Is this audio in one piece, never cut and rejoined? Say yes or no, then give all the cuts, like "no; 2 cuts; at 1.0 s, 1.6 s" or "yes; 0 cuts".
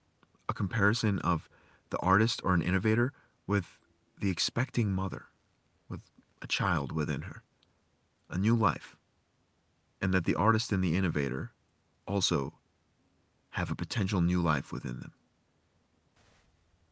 yes; 0 cuts